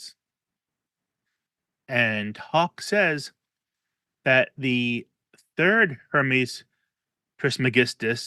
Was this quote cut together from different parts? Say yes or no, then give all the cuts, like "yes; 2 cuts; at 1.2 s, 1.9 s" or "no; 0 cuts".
no; 0 cuts